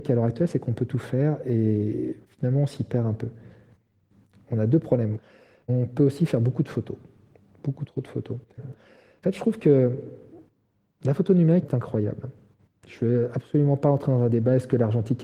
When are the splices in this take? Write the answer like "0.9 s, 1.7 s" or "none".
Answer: 8.6 s, 11.6 s

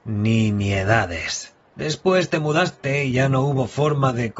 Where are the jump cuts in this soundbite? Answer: 1.7 s

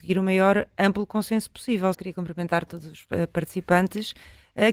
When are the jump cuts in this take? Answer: 1.9 s

